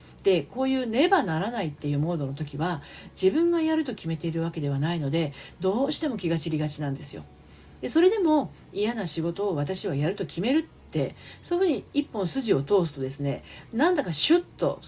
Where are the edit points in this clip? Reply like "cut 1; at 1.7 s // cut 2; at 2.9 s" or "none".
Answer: none

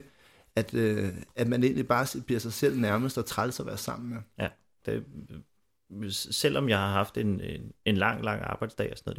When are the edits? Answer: cut 1; at 4.8 s

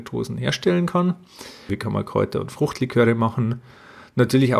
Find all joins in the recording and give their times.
cut 1; at 1.7 s

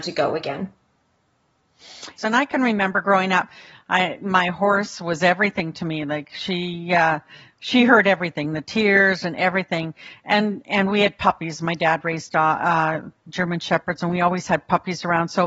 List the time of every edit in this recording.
cut 1; at 2.2 s

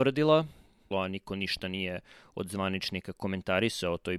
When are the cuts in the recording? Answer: cut 1; at 0.9 s

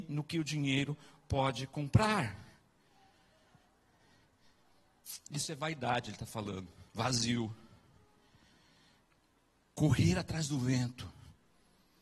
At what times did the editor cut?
cut 1; at 6.9 s

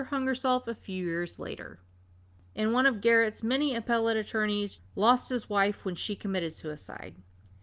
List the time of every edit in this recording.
cut 1; at 4.8 s

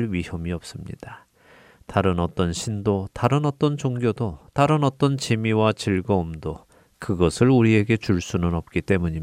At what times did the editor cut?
none

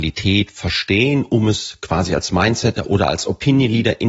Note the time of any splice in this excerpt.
none

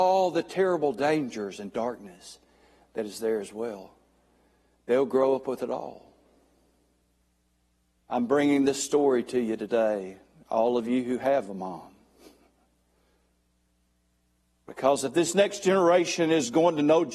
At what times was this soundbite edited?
cut 1; at 8.0 s

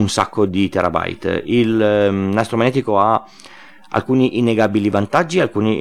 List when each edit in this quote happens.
none

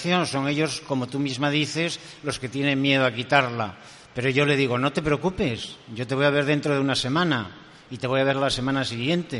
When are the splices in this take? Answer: none

